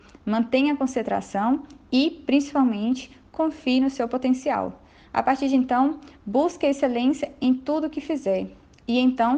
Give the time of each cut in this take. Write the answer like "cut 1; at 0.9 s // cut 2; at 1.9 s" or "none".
none